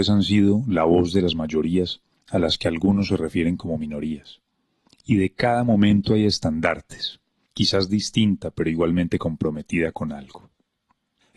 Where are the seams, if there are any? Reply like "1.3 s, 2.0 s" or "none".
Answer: 4.9 s, 7.5 s